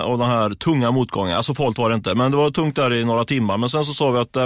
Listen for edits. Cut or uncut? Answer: uncut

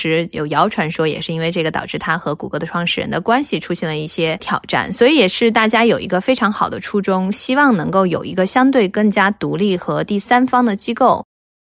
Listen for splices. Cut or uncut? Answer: uncut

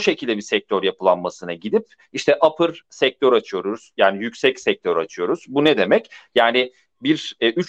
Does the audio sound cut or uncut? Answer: uncut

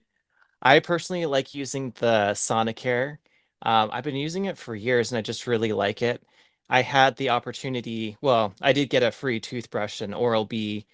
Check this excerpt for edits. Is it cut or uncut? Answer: uncut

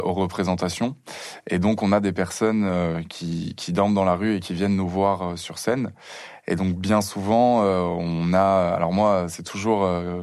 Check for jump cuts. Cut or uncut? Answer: uncut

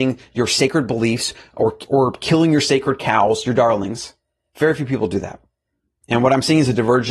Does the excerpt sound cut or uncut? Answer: uncut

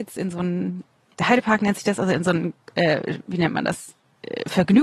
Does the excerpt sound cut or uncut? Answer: cut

